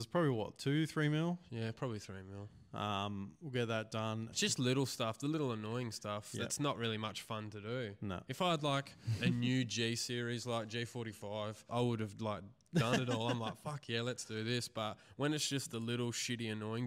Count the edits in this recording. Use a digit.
2